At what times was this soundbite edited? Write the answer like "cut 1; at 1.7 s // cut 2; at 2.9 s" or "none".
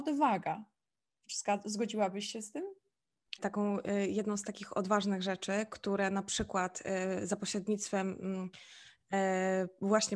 cut 1; at 3.4 s